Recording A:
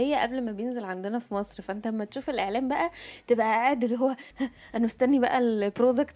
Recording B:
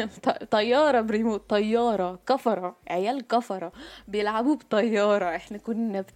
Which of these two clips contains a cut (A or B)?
A